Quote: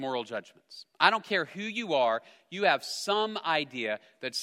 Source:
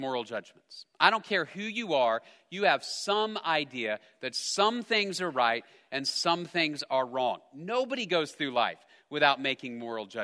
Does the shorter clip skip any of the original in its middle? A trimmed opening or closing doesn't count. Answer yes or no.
no